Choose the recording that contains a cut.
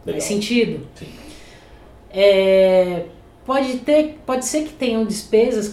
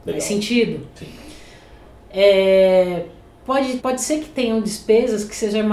second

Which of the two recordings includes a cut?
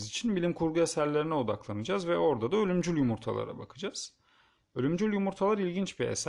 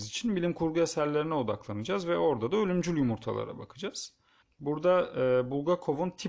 second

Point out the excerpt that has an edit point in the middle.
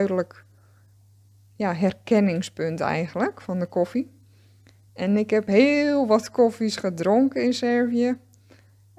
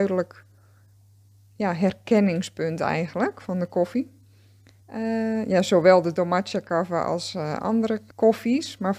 second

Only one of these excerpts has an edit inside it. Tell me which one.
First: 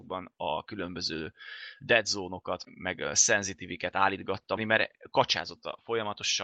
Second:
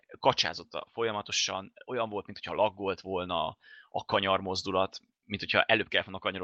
first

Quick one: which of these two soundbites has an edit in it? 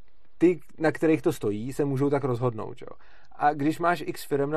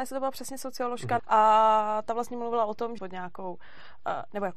second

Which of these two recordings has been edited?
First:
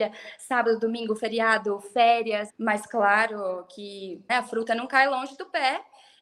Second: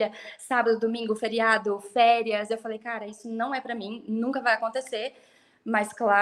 first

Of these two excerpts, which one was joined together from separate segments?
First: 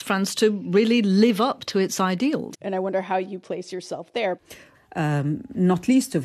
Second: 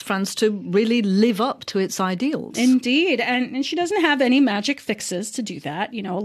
first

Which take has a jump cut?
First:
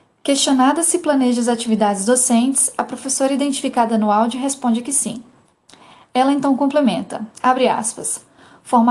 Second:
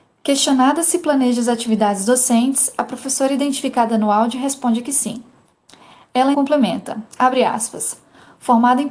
second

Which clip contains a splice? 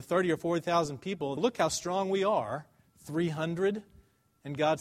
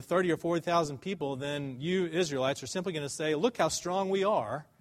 first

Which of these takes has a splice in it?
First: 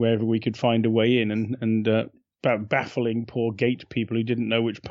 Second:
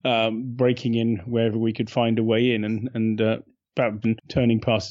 second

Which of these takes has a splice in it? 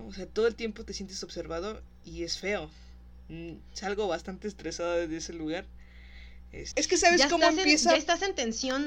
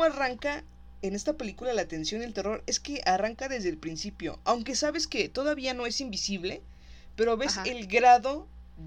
first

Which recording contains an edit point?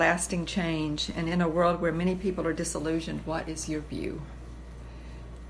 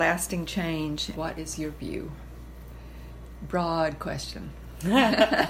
second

